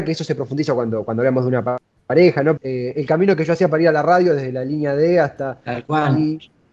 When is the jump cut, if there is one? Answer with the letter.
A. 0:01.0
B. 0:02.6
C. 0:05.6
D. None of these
B